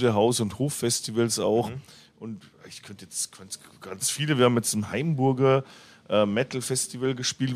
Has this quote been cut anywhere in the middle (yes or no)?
no